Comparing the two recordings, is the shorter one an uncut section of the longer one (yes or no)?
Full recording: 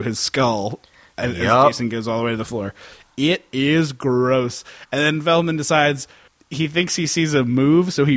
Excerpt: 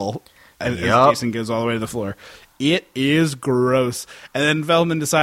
yes